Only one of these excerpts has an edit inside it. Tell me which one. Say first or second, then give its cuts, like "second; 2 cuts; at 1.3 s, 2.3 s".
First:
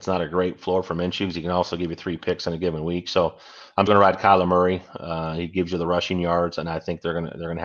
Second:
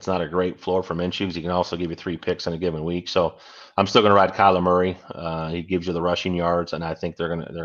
first; 1 cut; at 3.9 s